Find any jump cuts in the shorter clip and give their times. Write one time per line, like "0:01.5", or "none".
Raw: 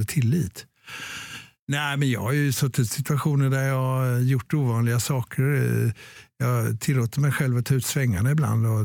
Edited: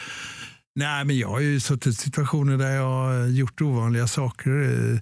none